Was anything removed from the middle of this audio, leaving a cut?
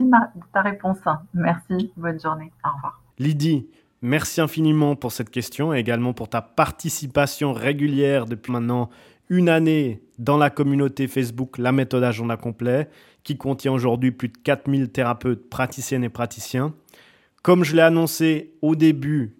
yes; 2 cuts; at 3.1 s, 8.5 s

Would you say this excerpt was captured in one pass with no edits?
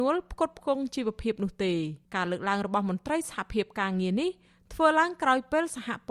no; 1 cut; at 2.1 s

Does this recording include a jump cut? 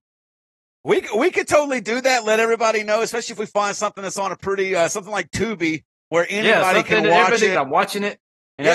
yes; 1 cut; at 7.6 s

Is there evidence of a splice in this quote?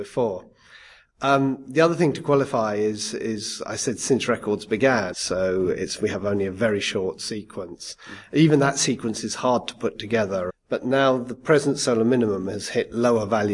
yes; 2 cuts; at 5.1 s, 10.5 s

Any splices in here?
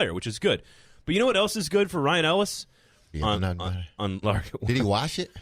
yes; 2 cuts; at 3.1 s, 4.2 s

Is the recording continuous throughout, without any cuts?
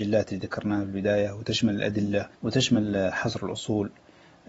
no; 1 cut; at 2.4 s

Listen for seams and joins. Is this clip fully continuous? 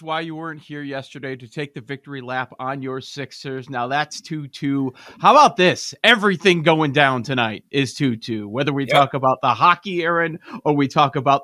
yes; 0 cuts

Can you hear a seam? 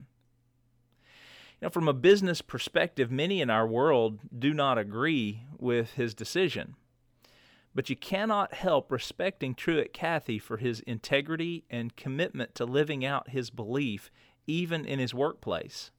no; 0 cuts

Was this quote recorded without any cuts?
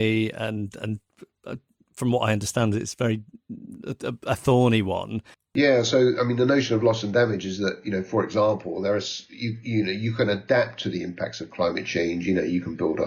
no; 1 cut; at 5.3 s

